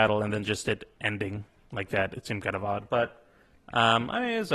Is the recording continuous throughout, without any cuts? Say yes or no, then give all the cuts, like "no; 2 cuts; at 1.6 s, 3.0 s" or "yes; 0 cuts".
yes; 0 cuts